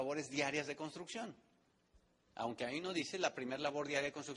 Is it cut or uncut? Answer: uncut